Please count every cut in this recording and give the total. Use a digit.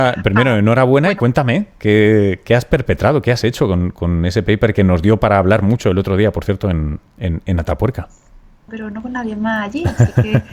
1